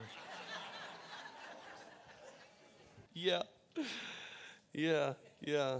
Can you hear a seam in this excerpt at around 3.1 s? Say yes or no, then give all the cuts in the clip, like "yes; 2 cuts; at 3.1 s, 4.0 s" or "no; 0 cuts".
yes; 1 cut; at 3.1 s